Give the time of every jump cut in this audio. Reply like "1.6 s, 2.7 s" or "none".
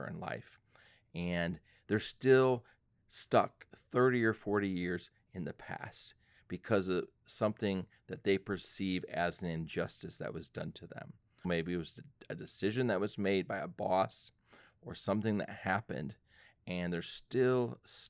11.4 s